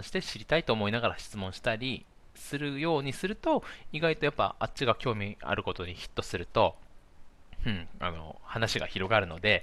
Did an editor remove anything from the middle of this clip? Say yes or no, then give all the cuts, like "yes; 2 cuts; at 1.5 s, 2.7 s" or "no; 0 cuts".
no; 0 cuts